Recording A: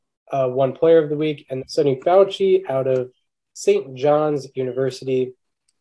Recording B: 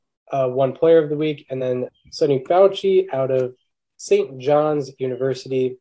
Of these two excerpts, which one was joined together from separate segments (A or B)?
A